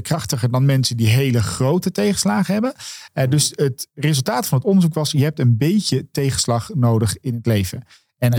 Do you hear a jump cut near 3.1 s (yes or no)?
no